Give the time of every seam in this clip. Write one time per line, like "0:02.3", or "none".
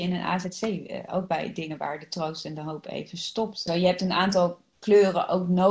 0:03.7